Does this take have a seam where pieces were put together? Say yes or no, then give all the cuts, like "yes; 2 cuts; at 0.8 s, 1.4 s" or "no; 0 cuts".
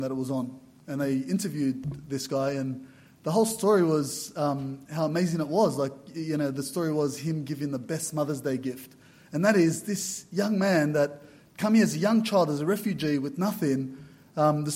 no; 0 cuts